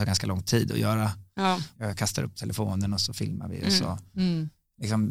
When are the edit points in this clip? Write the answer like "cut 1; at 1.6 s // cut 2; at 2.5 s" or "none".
cut 1; at 1.7 s